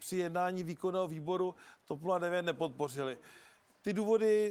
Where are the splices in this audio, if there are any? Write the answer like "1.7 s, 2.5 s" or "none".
none